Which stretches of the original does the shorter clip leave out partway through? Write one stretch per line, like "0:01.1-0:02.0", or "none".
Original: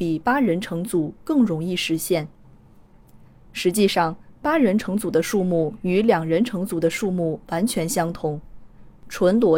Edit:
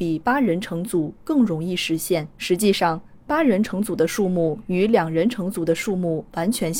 0:02.3-0:03.5